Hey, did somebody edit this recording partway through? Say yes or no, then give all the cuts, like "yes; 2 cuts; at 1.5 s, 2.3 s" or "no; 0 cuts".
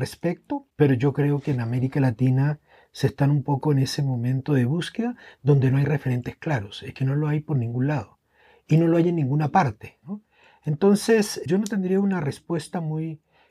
yes; 1 cut; at 10.0 s